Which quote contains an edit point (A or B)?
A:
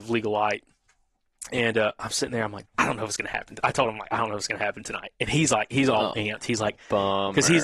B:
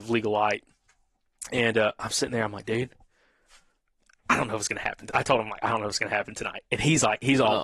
A